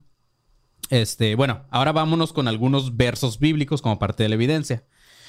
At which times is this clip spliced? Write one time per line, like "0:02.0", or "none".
none